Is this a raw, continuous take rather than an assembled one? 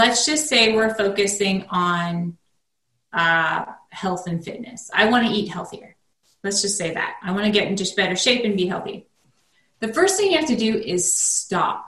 yes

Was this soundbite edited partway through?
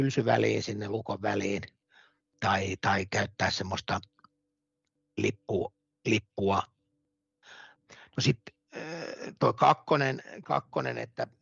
yes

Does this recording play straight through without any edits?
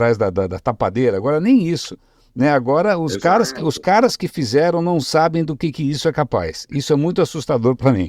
yes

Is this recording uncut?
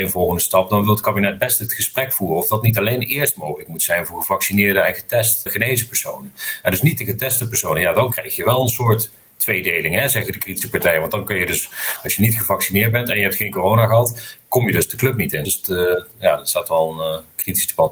no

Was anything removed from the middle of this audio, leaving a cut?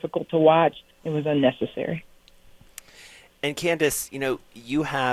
yes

